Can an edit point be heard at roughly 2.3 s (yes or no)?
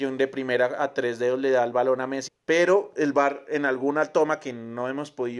yes